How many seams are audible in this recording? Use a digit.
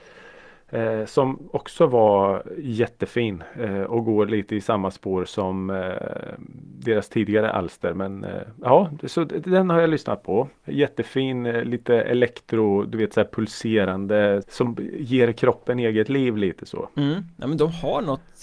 1